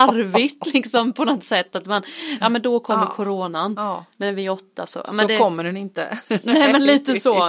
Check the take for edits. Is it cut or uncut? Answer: cut